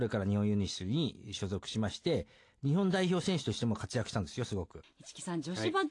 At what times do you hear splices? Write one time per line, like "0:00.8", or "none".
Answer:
0:04.8